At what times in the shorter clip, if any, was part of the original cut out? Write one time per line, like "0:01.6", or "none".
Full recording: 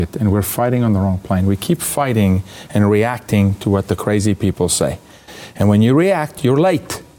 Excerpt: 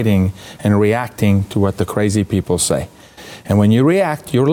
none